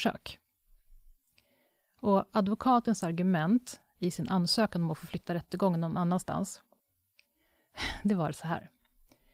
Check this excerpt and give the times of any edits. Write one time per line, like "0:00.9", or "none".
none